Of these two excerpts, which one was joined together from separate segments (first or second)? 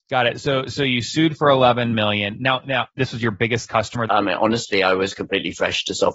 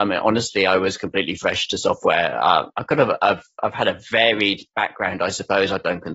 first